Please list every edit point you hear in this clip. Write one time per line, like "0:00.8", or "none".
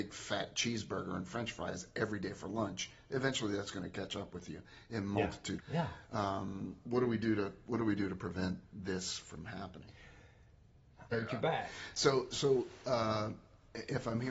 0:05.6
0:11.1